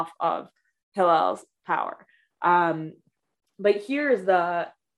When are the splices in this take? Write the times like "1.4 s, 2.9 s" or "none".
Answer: none